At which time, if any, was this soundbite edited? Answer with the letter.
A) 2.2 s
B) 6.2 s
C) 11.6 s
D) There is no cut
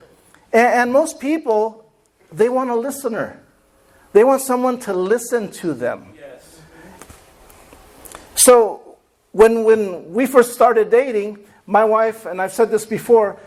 D